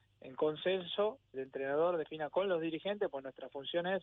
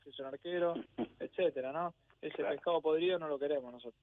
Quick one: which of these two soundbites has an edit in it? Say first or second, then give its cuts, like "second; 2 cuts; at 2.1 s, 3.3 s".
first; 1 cut; at 1.3 s